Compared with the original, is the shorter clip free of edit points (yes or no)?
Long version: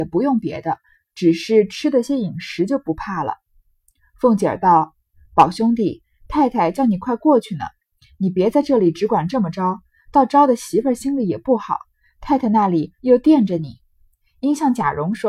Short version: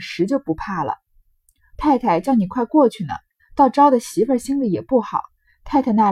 no